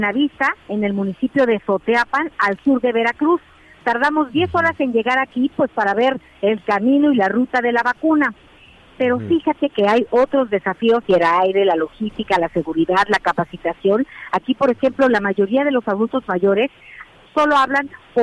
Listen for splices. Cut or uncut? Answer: cut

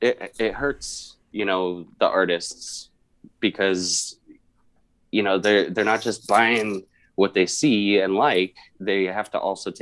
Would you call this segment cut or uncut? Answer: uncut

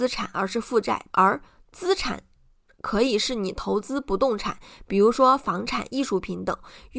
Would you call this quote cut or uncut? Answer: cut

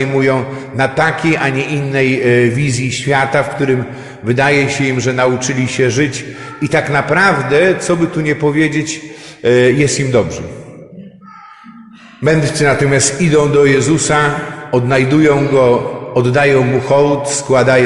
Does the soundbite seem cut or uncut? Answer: uncut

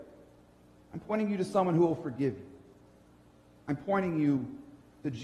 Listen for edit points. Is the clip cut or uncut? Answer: uncut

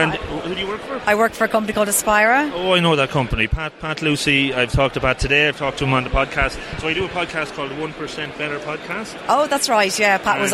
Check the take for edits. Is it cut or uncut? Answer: uncut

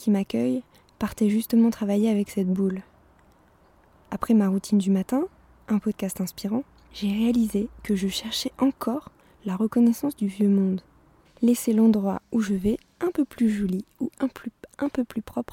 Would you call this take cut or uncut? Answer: cut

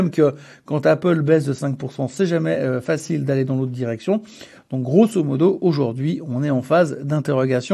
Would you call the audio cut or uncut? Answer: uncut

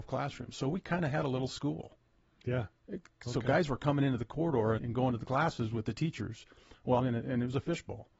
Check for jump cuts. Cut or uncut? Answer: cut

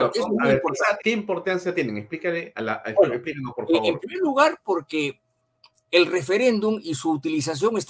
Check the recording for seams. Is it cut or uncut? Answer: cut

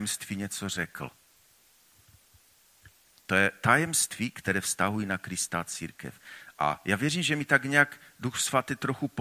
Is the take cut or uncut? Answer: uncut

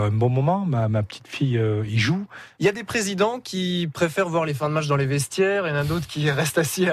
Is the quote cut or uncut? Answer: cut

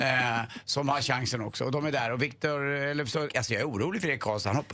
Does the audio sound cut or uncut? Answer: cut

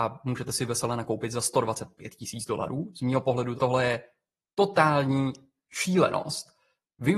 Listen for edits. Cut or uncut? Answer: cut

